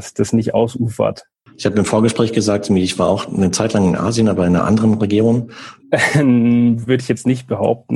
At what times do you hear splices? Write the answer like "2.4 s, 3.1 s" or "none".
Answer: 5.8 s